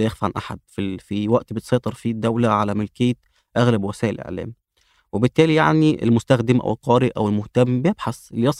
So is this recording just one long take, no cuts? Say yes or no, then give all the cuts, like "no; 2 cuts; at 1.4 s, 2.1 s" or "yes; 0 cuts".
yes; 0 cuts